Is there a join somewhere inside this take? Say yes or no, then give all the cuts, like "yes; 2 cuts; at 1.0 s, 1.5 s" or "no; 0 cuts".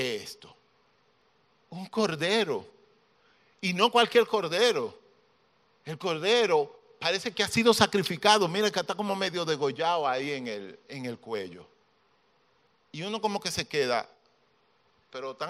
no; 0 cuts